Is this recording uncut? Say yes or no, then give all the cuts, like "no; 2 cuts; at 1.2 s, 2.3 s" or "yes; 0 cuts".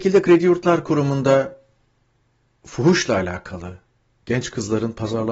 yes; 0 cuts